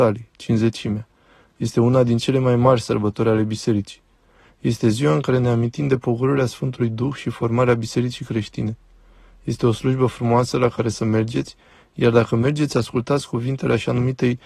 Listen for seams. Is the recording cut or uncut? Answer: uncut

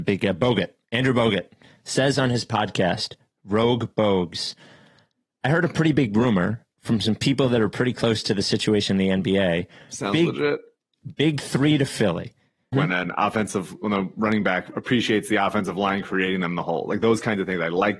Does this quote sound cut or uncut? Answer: cut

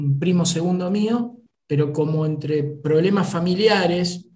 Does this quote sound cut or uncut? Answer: uncut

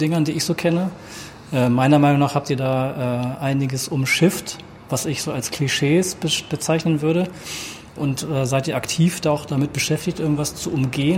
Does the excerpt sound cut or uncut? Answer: cut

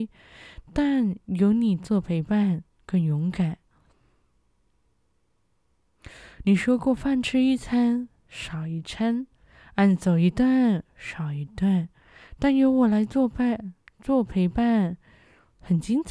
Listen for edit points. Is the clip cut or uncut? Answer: uncut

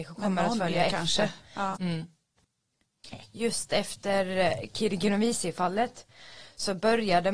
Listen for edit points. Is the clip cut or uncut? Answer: cut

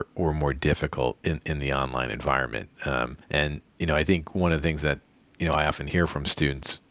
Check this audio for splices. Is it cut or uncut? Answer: cut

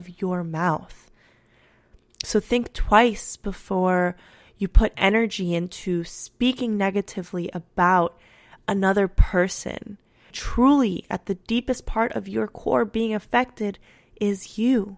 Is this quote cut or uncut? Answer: cut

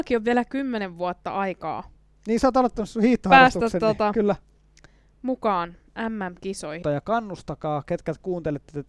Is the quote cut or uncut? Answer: cut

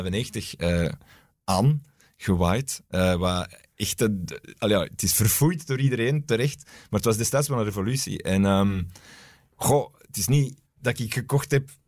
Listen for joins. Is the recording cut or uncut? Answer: uncut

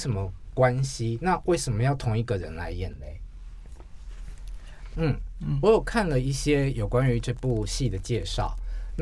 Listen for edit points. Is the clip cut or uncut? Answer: cut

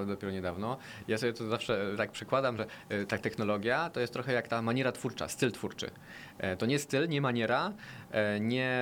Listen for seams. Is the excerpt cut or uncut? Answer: uncut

